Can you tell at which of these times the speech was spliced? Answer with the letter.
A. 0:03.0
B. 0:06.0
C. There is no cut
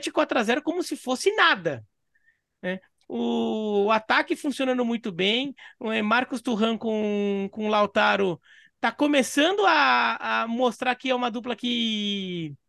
A